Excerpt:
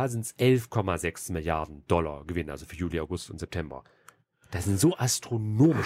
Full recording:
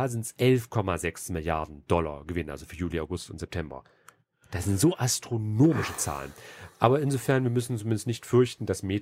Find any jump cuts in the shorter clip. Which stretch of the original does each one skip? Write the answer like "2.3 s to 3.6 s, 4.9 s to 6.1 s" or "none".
none